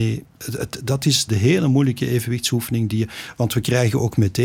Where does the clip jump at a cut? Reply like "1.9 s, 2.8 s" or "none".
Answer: 1.3 s